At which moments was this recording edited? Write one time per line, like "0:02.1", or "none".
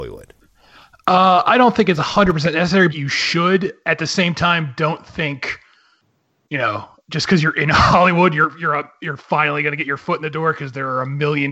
0:02.9